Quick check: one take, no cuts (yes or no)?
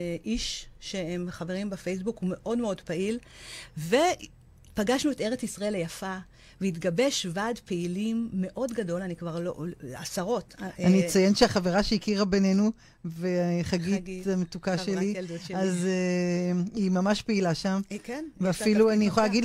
yes